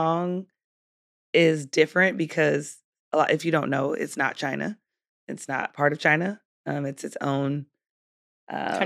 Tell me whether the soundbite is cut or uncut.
uncut